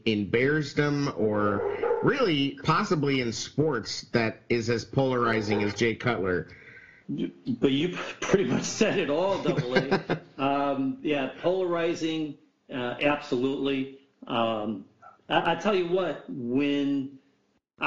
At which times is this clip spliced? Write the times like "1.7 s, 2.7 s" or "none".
7.0 s